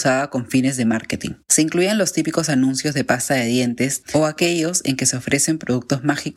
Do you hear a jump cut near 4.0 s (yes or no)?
yes